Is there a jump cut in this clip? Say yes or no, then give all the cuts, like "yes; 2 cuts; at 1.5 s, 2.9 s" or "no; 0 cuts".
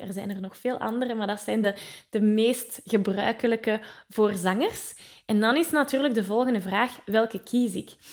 no; 0 cuts